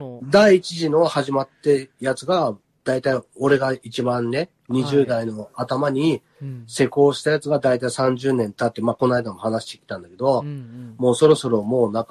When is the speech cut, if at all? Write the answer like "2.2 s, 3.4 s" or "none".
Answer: none